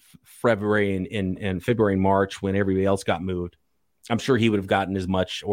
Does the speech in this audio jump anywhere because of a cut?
no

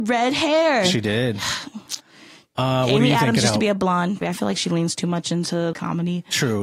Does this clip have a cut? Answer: yes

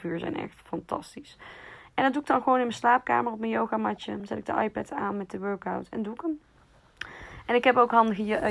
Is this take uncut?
yes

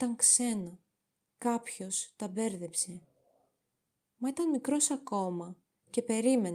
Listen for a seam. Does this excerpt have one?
no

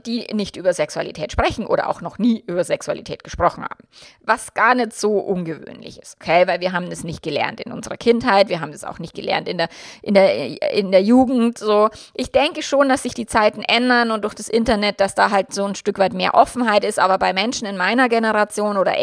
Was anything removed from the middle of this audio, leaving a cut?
no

